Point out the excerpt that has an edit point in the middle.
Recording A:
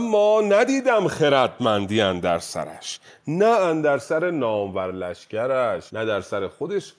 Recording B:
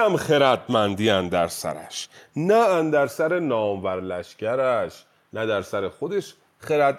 A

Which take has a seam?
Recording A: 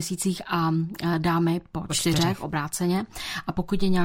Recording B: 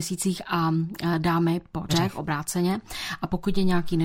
B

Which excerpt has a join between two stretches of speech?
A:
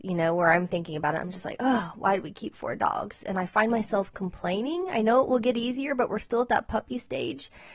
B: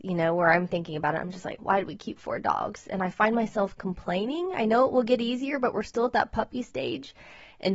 B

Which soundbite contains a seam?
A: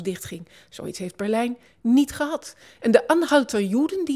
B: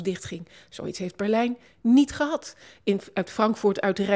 A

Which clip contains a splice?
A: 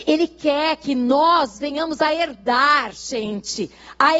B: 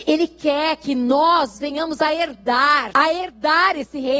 B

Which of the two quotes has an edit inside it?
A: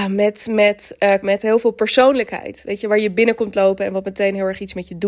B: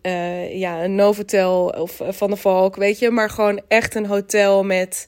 A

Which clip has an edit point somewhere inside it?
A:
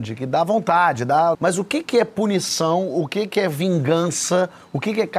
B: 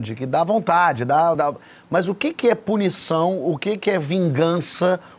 A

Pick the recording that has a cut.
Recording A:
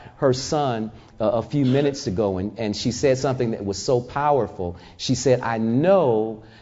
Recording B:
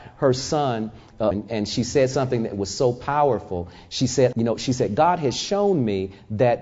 B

